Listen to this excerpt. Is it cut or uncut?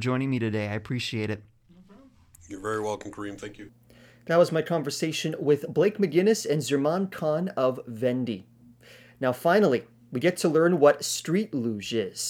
uncut